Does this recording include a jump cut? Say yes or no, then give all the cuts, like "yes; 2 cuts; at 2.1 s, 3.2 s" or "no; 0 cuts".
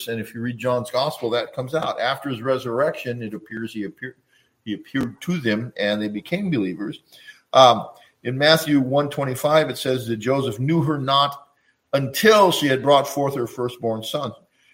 no; 0 cuts